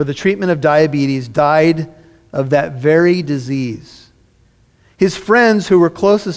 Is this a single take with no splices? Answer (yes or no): yes